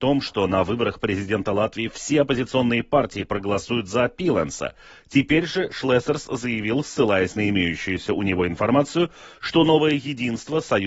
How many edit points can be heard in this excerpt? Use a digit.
0